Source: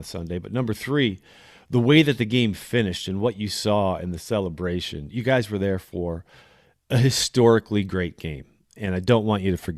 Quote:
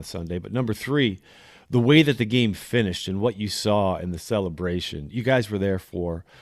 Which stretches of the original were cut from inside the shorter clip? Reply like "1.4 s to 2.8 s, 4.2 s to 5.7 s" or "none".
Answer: none